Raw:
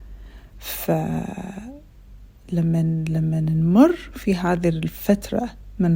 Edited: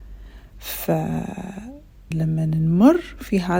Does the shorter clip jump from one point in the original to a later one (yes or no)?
yes